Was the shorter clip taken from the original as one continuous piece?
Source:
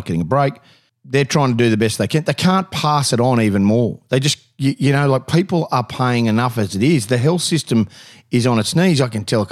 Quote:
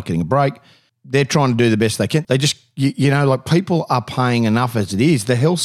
no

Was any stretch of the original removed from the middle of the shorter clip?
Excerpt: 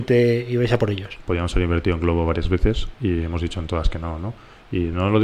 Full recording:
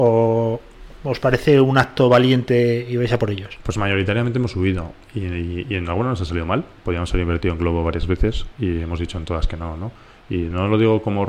yes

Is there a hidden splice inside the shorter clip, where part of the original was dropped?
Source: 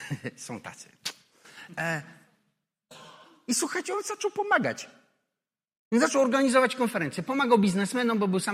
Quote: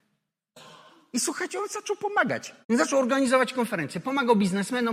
yes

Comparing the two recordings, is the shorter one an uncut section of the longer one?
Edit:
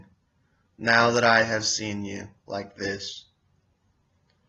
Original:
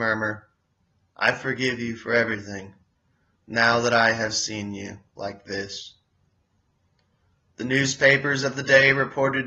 yes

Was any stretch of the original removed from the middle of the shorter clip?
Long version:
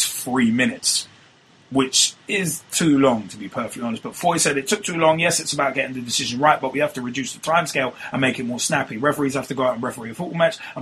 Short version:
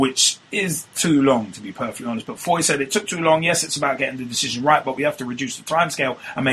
no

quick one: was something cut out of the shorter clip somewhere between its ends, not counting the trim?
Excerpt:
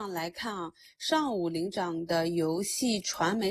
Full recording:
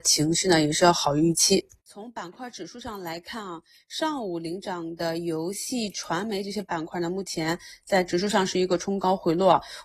no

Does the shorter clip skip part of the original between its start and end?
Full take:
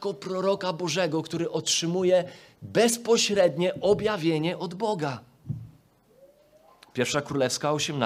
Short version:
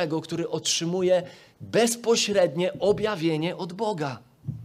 no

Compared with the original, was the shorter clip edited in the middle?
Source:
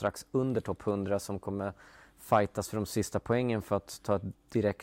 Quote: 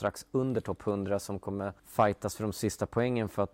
yes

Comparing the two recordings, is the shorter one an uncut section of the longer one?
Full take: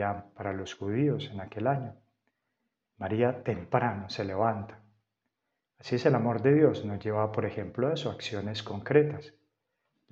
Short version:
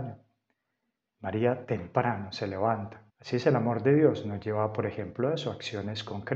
no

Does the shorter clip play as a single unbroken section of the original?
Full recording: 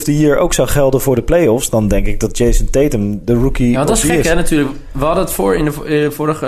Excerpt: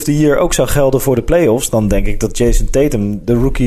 yes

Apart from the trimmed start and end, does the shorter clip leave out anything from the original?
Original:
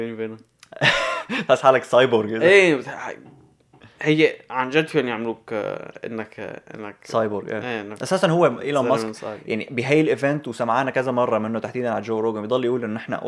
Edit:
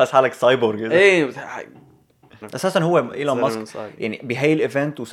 yes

